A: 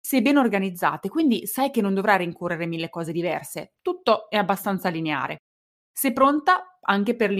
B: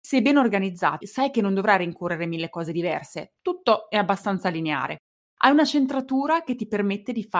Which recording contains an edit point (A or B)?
B